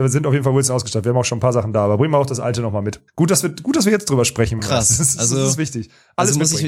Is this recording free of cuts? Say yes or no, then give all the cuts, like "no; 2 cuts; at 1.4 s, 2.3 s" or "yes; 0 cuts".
no; 2 cuts; at 3.1 s, 4.6 s